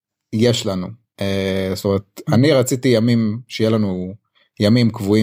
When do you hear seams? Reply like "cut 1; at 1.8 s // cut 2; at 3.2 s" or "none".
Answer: none